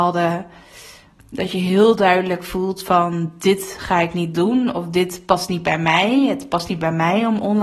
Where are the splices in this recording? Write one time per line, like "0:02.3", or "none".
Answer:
0:01.3